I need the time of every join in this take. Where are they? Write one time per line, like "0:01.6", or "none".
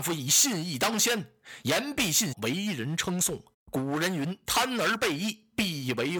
0:02.3
0:03.5